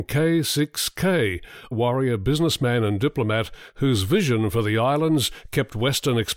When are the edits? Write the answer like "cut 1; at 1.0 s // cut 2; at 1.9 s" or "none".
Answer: cut 1; at 1.7 s